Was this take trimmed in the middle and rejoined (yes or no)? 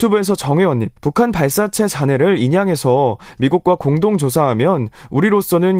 yes